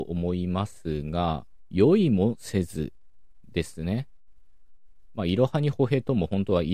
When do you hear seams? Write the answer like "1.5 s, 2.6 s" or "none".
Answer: 1.7 s